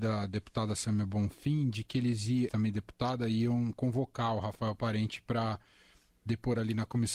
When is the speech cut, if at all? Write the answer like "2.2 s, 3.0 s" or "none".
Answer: 2.5 s